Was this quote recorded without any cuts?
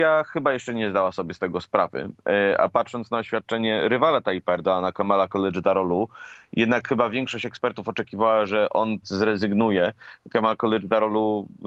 yes; 0 cuts

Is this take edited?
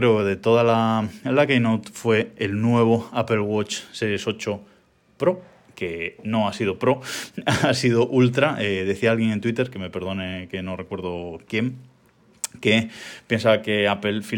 no; 0 cuts

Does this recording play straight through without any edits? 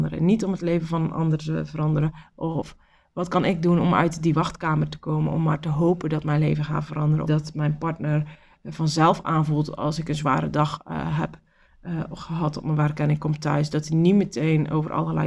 no; 1 cut; at 7.3 s

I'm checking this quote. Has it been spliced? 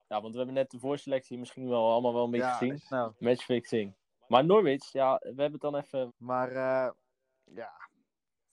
yes; 2 cuts; at 2.9 s, 6.1 s

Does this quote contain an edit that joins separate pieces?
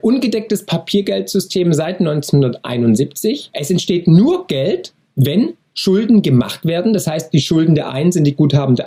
no; 0 cuts

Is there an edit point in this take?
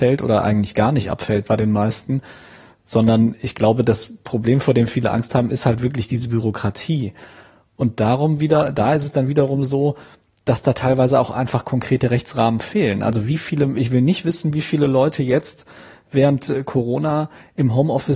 no; 0 cuts

